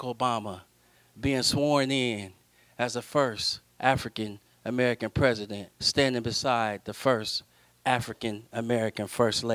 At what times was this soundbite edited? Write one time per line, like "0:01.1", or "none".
0:05.7